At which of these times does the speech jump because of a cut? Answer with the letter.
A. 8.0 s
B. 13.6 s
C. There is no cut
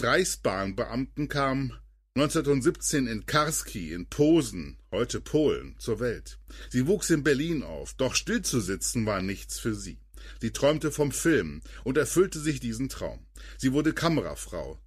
A